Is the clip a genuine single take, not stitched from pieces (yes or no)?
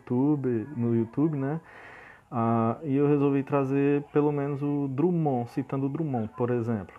yes